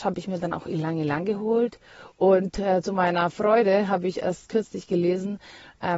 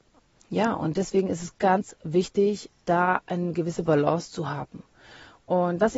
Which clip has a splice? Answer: second; 1 cut; at 2.8 s

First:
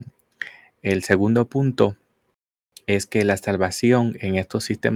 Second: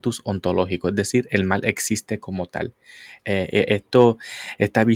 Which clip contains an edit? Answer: second; 1 cut; at 3.2 s

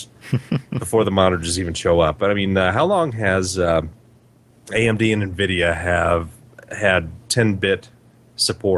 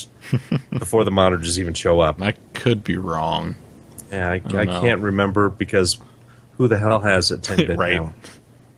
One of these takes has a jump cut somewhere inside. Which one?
second; 1 cut; at 2.2 s

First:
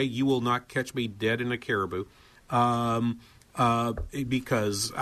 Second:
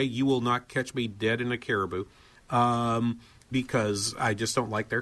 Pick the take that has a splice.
second; 1 cut; at 3.5 s

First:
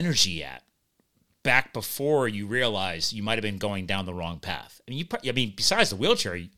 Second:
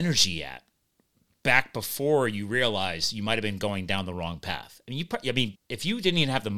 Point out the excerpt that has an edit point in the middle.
second; 1 cut; at 5.5 s

